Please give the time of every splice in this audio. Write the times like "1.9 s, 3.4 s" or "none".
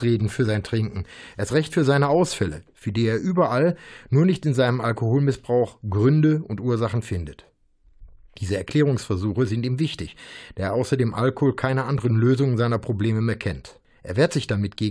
none